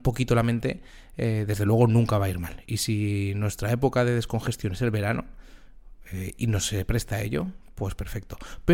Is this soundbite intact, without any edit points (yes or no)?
yes